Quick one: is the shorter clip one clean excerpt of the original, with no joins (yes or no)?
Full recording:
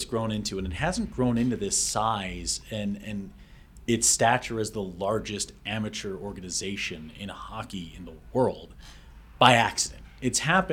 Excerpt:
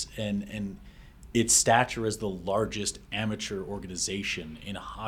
yes